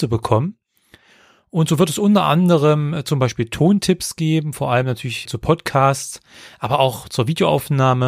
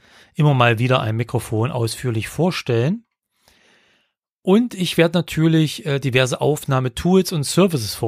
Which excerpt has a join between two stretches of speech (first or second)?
first